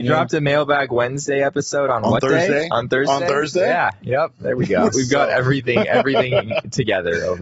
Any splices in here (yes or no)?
yes